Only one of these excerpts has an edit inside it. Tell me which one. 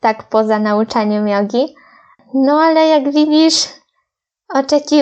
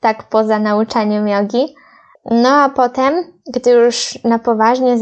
second; 1 cut; at 2.2 s

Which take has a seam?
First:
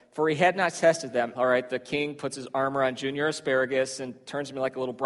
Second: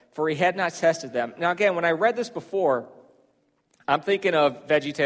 first; 1 cut; at 1.3 s

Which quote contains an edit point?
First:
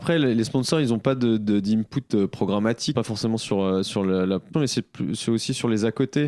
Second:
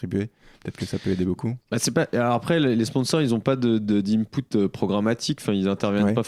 first; 2 cuts; at 2.9 s, 4.5 s

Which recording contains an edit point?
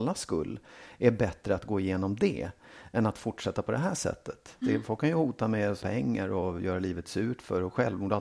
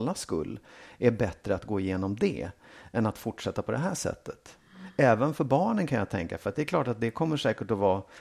first; 2 cuts; at 4.6 s, 5.8 s

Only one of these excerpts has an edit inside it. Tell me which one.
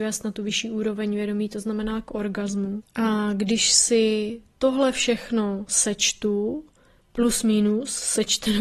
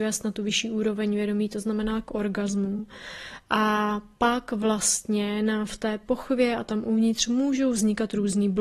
first; 1 cut; at 2.8 s

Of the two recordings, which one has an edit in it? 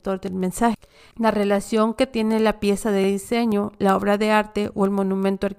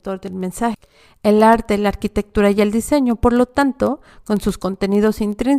first; 1 cut; at 1.1 s

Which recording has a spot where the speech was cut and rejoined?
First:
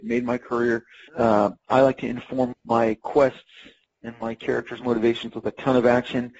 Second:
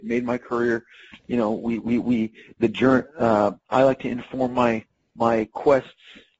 first; 2 cuts; at 1.1 s, 2.5 s

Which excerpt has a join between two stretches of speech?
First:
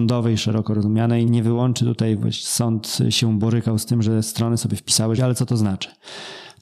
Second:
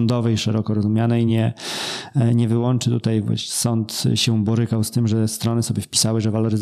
first; 2 cuts; at 1.3 s, 5.2 s

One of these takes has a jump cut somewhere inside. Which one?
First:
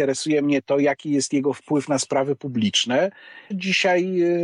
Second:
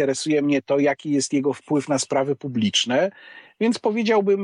first; 1 cut; at 3.5 s

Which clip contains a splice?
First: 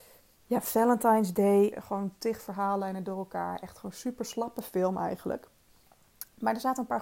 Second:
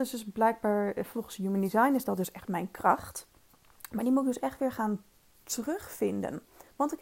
first; 1 cut; at 1.7 s

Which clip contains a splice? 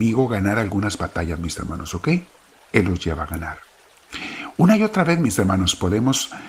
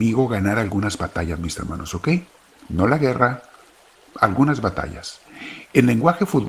first; 1 cut; at 2.6 s

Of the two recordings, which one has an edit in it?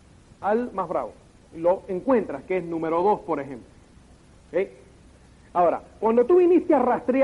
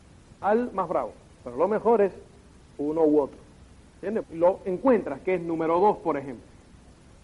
second; 2 cuts; at 1.3 s, 4.2 s

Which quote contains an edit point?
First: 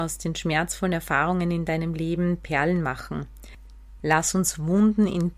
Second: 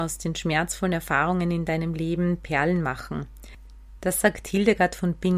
first; 1 cut; at 4.0 s

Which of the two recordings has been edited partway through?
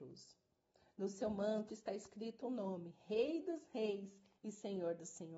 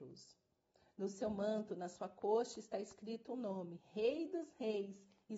first; 1 cut; at 1.7 s

